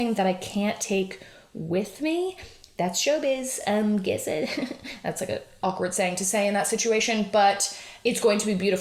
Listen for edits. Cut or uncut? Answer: uncut